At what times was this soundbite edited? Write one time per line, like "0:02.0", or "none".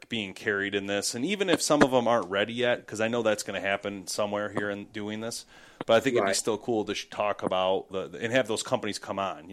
0:07.9

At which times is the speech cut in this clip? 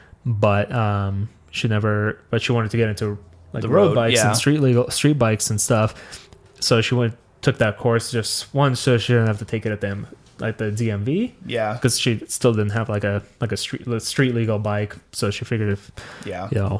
none

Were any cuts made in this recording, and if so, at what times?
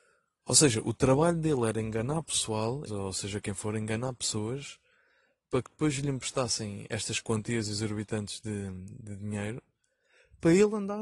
0:02.9

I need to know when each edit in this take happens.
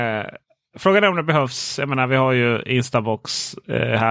none

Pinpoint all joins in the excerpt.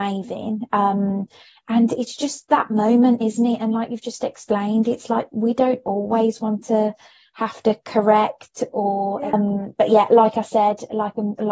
0:09.3

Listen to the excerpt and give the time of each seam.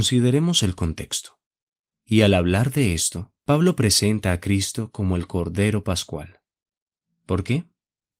0:01.9
0:03.4

